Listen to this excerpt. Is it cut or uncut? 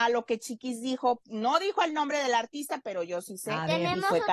cut